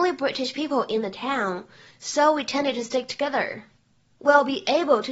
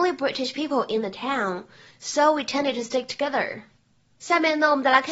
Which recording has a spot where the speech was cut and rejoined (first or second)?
first